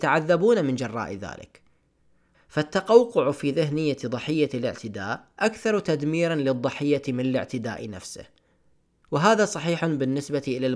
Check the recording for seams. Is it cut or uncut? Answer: cut